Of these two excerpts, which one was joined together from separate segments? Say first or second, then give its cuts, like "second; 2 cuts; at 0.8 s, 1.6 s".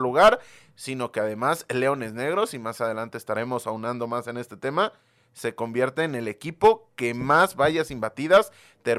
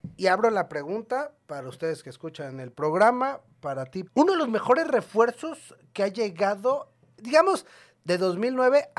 second; 1 cut; at 4.1 s